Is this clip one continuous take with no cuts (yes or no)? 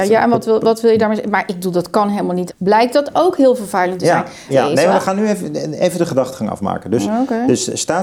no